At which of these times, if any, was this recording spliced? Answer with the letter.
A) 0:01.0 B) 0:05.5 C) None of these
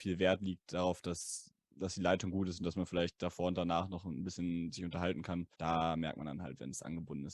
B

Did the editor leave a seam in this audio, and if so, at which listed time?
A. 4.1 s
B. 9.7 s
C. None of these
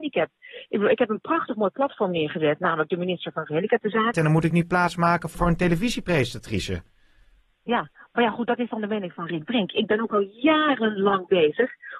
A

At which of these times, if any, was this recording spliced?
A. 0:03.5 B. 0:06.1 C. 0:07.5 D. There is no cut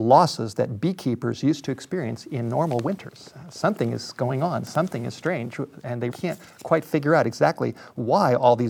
B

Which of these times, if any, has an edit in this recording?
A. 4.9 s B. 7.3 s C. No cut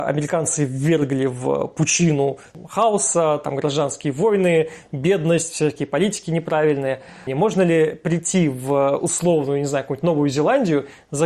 B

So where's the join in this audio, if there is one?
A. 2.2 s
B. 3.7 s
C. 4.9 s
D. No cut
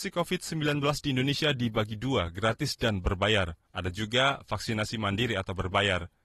B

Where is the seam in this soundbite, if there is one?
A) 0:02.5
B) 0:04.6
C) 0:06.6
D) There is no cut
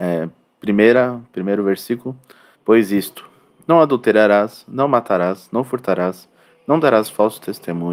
A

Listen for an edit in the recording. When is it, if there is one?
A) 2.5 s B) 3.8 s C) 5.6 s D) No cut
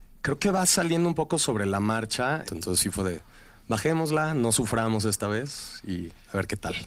A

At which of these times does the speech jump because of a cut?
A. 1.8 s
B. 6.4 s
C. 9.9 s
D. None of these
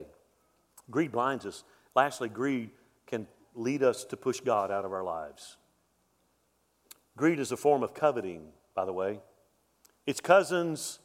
D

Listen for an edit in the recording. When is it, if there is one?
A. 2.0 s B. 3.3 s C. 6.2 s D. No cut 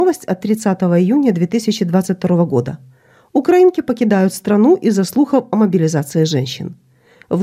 D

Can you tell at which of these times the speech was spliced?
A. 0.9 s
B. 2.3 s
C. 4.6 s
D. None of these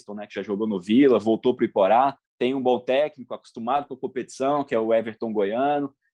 B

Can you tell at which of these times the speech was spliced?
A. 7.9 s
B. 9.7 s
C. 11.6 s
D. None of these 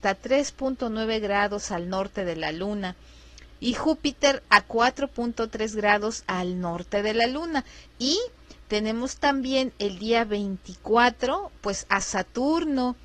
A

